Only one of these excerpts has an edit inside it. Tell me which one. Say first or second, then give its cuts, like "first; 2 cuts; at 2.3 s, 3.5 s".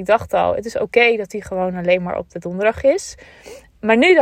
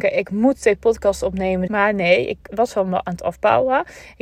second; 1 cut; at 1.7 s